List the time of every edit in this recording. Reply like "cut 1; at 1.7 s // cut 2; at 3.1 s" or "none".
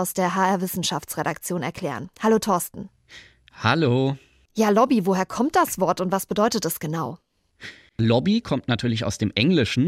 none